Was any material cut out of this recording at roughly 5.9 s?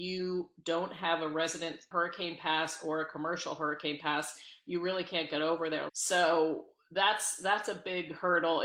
yes; 1 cut; at 5.9 s

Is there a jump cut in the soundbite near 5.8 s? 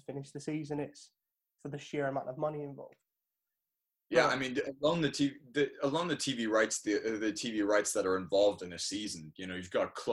no; 0 cuts

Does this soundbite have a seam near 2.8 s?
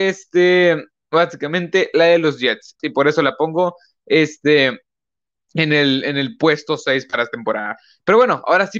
yes; 1 cut; at 2.8 s

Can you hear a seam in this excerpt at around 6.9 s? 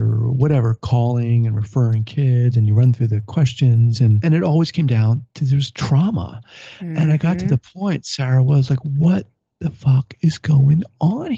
no; 0 cuts

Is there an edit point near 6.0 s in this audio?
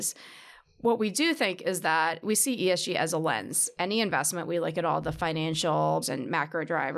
yes; 3 cuts; at 2.2 s, 3.8 s, 6.0 s

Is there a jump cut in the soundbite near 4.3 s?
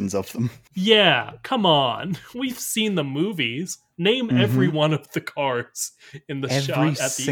no; 1 cut; at 2.3 s

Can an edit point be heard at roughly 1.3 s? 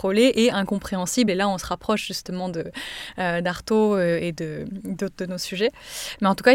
no; 0 cuts

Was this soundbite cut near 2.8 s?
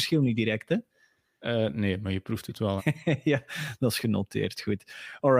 yes; 1 cut; at 2.8 s

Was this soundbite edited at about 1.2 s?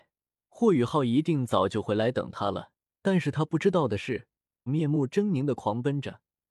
no; 2 cuts; at 3.0 s, 4.7 s

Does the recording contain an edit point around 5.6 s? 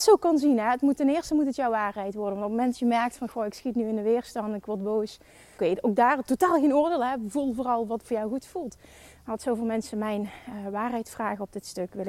yes; 1 cut; at 5.6 s

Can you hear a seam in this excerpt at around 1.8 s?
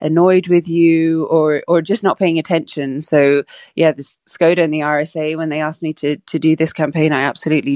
no; 0 cuts

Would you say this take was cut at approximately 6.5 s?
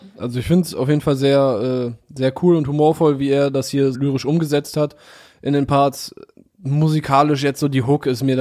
no; 1 cut; at 3.9 s

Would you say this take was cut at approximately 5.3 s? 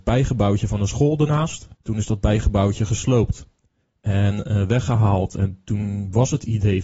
no; 1 cut; at 1.7 s

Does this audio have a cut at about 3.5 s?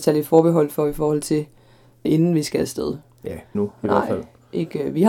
yes; 2 cuts; at 2.0 s, 3.5 s

